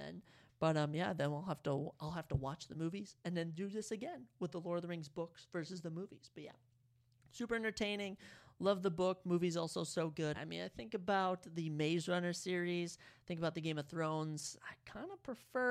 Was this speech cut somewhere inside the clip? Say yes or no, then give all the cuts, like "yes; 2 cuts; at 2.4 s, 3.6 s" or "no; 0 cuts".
yes; 1 cut; at 10.3 s